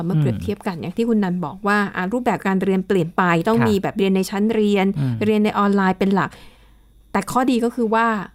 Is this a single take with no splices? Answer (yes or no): yes